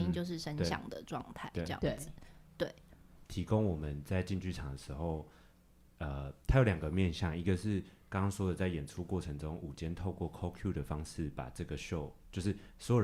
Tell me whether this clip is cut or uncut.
cut